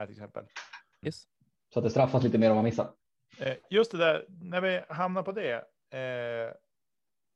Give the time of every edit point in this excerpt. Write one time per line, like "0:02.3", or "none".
0:01.0